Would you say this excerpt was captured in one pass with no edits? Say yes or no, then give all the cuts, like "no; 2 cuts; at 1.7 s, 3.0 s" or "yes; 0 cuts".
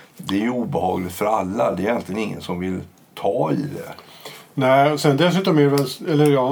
yes; 0 cuts